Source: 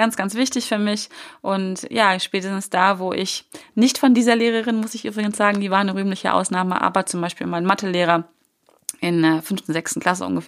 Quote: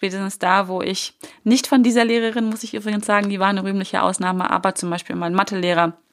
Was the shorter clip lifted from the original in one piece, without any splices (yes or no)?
yes